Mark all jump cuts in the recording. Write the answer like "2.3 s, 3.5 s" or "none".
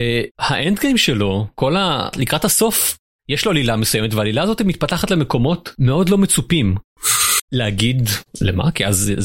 7.4 s